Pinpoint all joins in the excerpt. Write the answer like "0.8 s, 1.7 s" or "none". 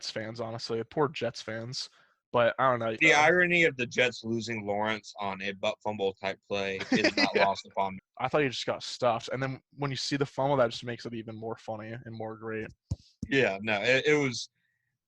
3.0 s, 8.0 s